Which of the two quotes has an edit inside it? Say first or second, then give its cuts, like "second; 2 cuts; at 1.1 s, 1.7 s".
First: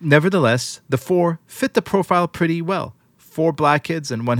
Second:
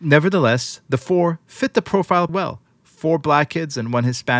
second; 1 cut; at 2.3 s